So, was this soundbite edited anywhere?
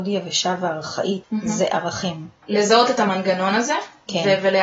yes; 2 cuts; at 1.2 s, 2.4 s

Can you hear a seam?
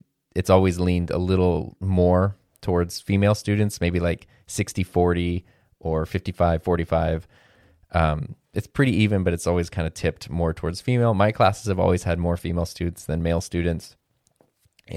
no; 0 cuts

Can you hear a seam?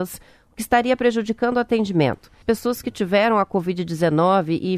yes; 1 cut; at 2.4 s

